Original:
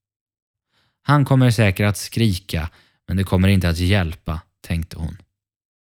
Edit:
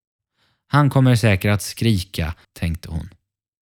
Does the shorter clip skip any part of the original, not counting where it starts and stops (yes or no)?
yes